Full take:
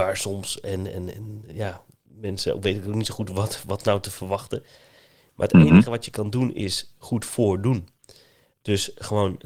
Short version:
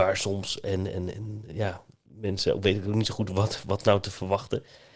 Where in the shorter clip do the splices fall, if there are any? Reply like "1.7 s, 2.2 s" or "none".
none